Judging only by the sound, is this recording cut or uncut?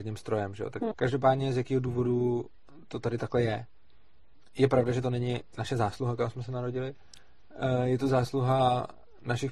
cut